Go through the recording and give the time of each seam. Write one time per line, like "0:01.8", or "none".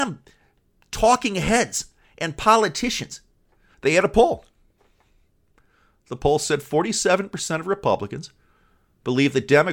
0:03.7